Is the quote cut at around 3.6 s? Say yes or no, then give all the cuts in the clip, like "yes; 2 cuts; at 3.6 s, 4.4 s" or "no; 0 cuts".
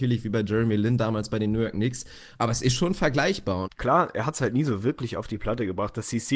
yes; 1 cut; at 3.6 s